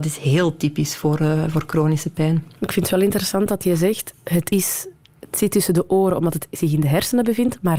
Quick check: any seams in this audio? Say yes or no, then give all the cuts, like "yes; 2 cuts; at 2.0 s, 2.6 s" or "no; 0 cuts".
no; 0 cuts